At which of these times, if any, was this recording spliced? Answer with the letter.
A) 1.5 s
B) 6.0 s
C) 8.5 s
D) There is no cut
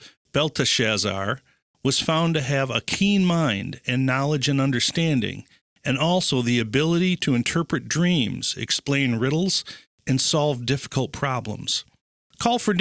D